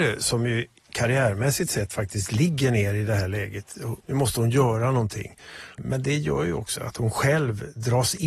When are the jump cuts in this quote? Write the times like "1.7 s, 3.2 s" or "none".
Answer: 4.0 s, 6.8 s